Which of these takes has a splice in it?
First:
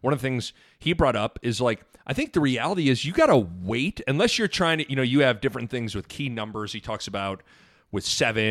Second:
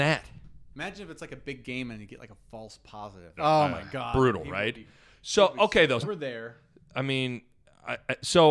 second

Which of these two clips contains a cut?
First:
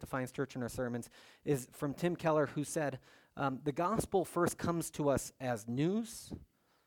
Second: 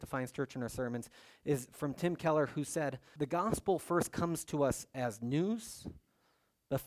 second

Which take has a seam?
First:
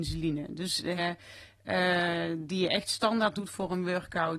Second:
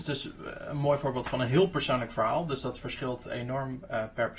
first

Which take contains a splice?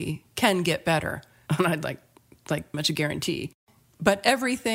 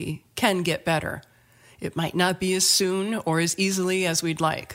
first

